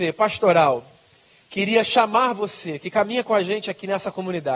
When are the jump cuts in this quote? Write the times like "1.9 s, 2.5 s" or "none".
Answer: none